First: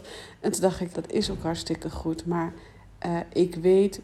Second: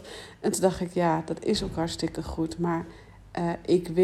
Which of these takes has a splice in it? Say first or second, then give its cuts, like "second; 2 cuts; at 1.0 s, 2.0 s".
first; 1 cut; at 0.9 s